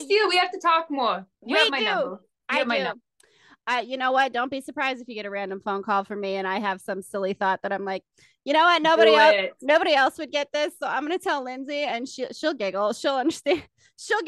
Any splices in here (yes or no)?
no